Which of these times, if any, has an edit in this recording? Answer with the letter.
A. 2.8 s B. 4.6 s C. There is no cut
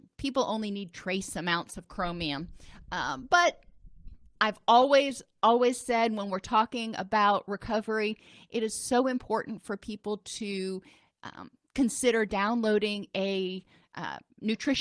C